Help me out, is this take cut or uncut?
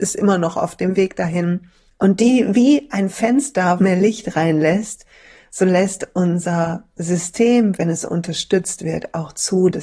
cut